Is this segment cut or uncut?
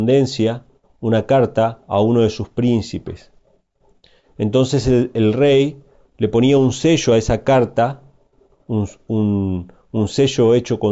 uncut